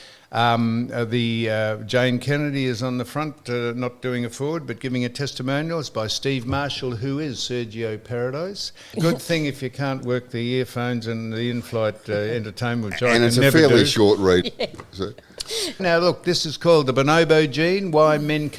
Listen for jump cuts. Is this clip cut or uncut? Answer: cut